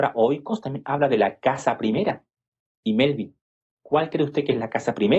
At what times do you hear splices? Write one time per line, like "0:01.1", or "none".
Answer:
none